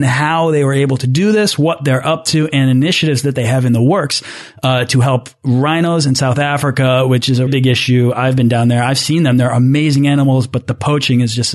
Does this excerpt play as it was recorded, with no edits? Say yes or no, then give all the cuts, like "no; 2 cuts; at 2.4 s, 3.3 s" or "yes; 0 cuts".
no; 1 cut; at 7.5 s